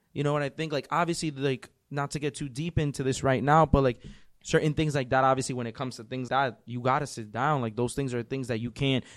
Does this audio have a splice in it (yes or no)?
yes